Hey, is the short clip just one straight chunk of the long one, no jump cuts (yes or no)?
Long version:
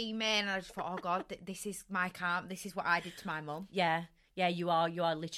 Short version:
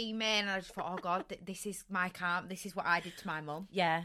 yes